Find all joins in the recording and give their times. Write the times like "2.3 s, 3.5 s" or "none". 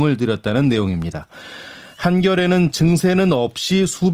none